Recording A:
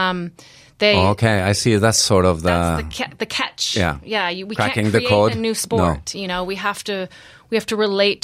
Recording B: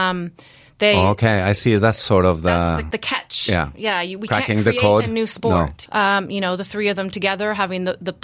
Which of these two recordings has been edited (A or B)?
B